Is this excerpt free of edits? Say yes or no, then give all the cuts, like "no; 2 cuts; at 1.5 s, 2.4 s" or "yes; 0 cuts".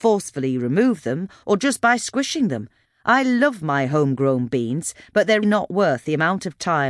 no; 3 cuts; at 1.4 s, 2.8 s, 5.4 s